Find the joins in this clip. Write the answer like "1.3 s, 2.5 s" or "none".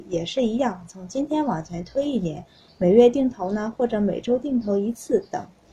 none